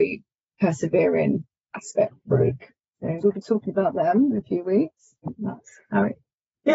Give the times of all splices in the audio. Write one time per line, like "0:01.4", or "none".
0:03.2
0:05.2